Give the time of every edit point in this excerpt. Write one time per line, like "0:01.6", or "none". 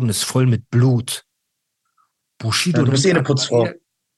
0:02.2